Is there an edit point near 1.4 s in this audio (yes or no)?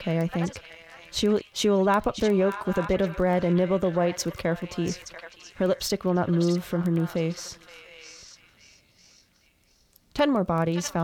yes